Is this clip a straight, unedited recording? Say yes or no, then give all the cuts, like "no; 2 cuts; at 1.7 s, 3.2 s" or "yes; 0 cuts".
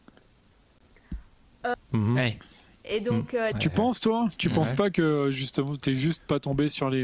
no; 2 cuts; at 1.7 s, 3.5 s